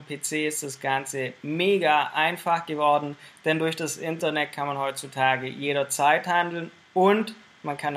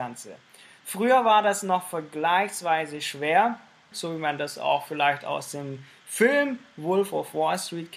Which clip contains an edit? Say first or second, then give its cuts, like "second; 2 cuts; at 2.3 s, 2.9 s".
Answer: second; 1 cut; at 3.9 s